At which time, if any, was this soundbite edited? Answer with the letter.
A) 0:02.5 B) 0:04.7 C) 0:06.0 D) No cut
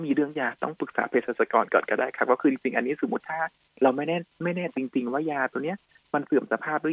B